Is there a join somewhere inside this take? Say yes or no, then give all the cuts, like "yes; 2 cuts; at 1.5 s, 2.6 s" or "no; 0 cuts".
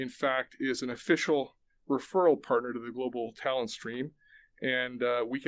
no; 0 cuts